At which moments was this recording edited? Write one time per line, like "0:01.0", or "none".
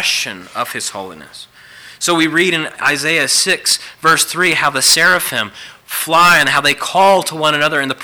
none